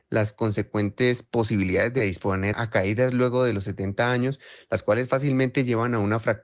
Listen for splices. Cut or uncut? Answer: cut